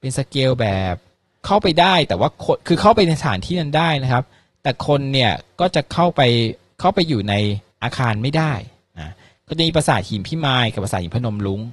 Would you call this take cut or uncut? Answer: cut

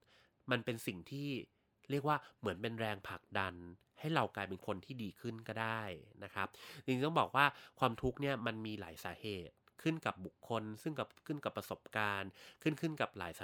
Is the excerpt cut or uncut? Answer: uncut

